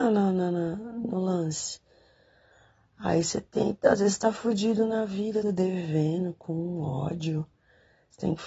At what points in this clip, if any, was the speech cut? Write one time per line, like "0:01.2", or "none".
0:05.4